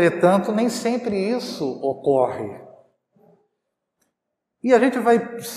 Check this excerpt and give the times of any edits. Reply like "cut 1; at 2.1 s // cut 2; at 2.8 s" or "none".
none